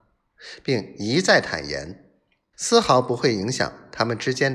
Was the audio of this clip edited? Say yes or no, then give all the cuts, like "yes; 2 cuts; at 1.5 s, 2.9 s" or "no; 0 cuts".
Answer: yes; 1 cut; at 2.5 s